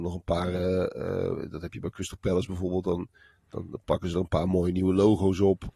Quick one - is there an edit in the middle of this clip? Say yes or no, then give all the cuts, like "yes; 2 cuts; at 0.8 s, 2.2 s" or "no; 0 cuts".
no; 0 cuts